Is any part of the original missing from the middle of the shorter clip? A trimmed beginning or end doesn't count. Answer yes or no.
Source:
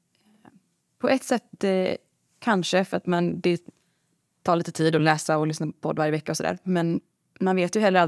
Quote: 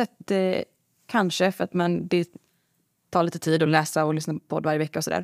no